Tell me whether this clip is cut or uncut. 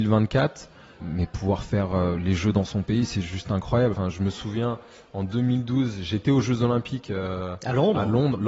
uncut